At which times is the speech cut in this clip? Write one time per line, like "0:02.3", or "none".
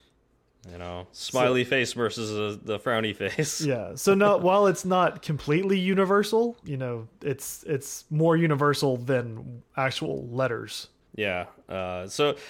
0:06.6
0:11.0